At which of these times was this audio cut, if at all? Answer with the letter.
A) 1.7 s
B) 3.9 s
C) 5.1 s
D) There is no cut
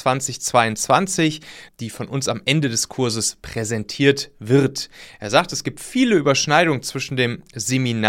A